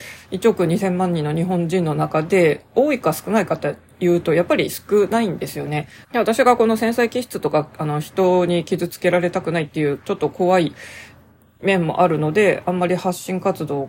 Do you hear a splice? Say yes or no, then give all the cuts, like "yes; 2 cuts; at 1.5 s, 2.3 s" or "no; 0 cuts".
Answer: yes; 1 cut; at 6.0 s